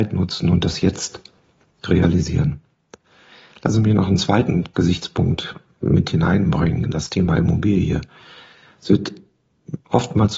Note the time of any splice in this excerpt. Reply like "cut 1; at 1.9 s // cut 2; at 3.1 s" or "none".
none